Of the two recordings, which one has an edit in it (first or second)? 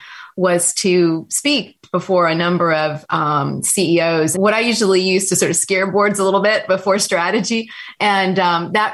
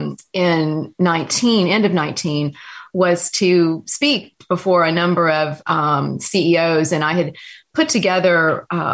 first